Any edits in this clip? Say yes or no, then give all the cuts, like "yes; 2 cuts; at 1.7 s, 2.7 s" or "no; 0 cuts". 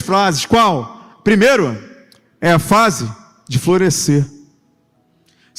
no; 0 cuts